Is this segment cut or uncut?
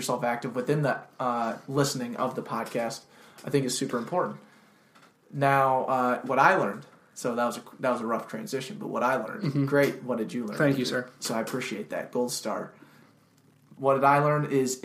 uncut